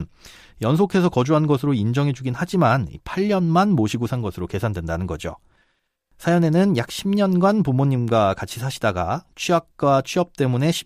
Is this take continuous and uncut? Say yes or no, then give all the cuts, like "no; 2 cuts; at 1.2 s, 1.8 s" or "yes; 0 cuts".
yes; 0 cuts